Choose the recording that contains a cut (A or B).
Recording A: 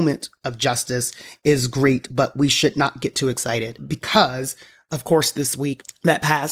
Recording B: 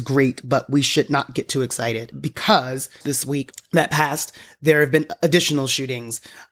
B